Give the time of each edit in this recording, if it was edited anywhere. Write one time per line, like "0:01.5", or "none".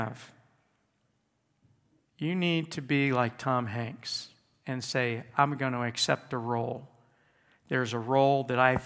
0:02.0